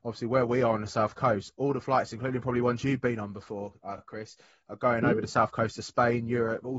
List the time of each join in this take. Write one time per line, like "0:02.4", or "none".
none